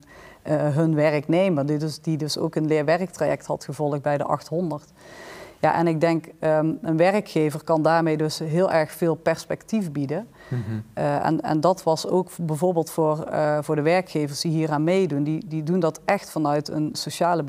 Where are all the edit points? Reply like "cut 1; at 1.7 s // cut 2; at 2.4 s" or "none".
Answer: none